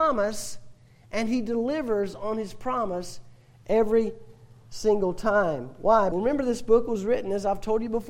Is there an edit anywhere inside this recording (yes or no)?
yes